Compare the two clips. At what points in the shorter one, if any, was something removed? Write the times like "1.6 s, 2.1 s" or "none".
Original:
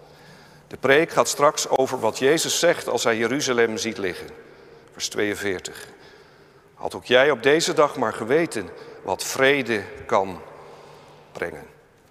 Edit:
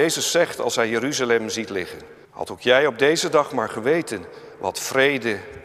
2.2 s